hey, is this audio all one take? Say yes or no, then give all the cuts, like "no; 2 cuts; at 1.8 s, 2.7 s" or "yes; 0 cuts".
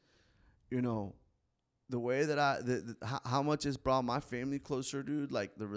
yes; 0 cuts